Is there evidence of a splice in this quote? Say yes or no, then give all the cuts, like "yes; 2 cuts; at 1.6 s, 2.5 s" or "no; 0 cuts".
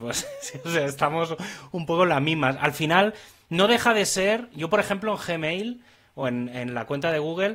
no; 0 cuts